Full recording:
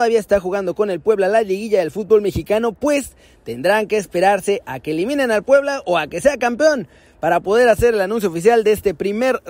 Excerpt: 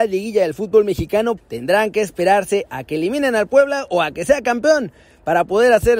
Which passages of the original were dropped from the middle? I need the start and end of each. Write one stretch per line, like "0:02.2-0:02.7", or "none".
0:02.7-0:03.3